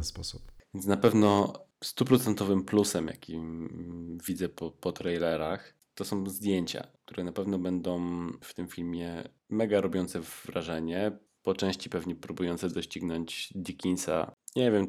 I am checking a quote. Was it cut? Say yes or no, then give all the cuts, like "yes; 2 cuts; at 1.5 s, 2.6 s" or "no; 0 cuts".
no; 0 cuts